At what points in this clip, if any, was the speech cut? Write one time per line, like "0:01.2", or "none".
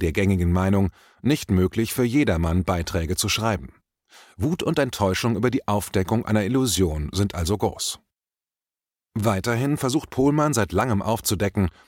none